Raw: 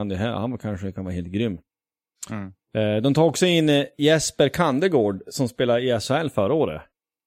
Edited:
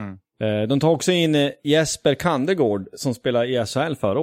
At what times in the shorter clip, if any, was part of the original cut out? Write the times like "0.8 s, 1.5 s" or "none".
none